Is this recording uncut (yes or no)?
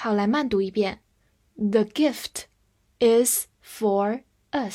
yes